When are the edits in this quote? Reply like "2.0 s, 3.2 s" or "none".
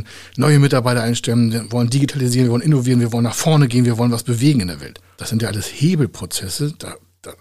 5.1 s